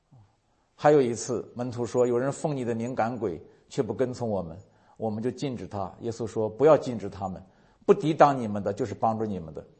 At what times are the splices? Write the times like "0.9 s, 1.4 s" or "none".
none